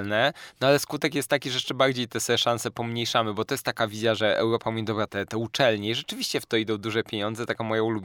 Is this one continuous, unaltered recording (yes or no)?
no